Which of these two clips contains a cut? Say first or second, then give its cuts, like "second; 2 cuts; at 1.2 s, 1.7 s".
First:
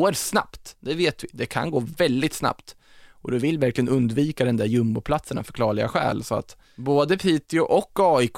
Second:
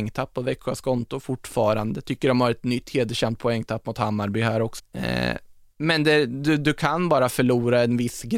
second; 1 cut; at 4.8 s